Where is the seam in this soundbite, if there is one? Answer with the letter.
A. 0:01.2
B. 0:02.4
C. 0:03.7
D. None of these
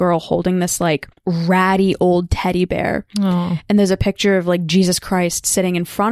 A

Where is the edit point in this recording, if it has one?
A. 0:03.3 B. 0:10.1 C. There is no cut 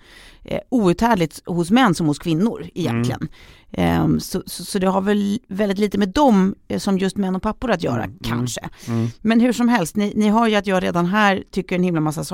C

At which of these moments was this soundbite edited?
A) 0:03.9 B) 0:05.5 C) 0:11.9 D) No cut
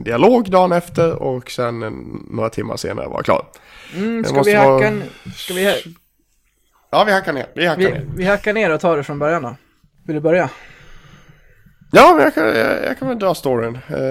D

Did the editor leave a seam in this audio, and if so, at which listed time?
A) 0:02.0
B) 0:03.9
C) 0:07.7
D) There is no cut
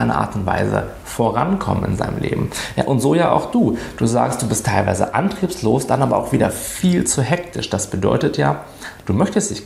D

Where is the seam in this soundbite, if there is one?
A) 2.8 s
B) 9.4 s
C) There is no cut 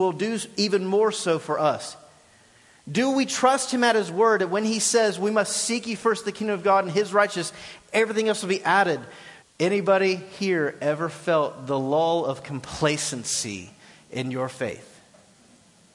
B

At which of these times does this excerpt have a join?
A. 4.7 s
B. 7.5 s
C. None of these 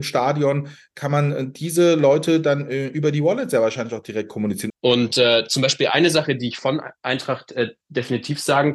A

